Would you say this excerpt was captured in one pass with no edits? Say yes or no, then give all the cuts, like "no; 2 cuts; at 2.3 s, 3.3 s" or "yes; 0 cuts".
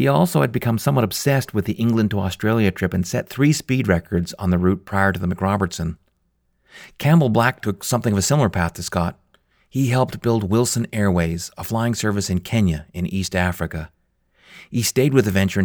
yes; 0 cuts